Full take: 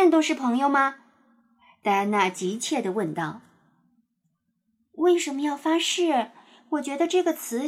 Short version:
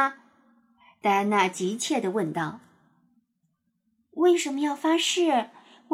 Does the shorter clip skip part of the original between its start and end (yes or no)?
no